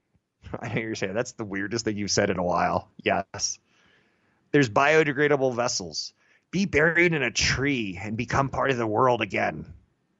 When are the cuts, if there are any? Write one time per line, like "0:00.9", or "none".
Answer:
none